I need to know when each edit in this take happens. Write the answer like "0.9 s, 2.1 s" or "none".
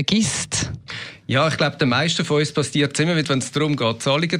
3.2 s